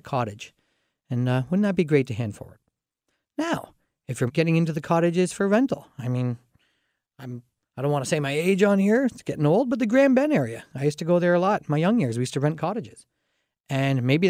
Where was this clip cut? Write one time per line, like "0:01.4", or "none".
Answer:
0:04.3

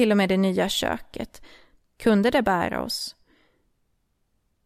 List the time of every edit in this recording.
0:01.9

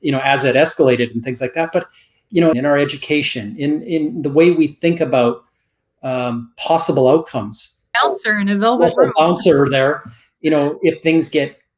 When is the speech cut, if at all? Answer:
0:02.5
0:07.9

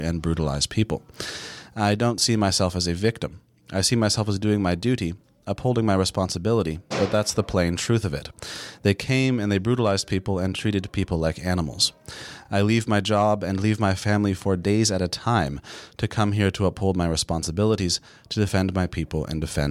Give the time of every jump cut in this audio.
none

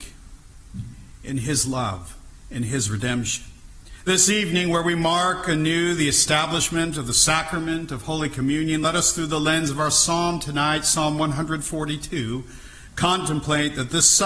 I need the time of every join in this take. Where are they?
none

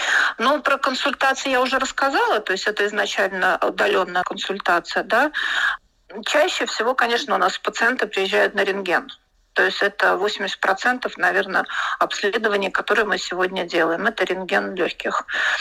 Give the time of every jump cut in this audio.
none

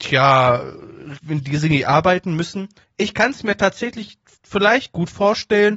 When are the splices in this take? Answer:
0:01.2
0:02.8

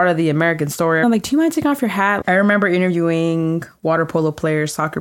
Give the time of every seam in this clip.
0:01.0
0:02.2

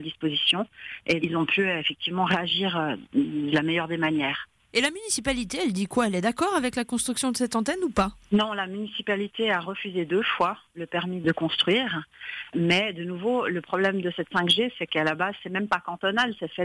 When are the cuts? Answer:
0:01.2

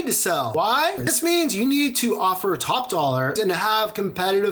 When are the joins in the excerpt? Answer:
0:01.0
0:03.4

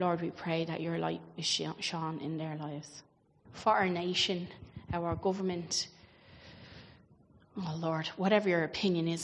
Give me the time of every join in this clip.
0:03.5

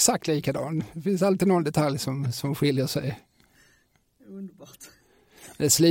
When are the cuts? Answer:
none

